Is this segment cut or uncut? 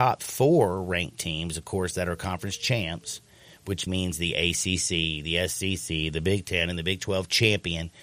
cut